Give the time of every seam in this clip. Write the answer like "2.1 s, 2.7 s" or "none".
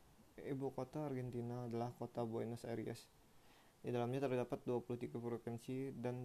3.6 s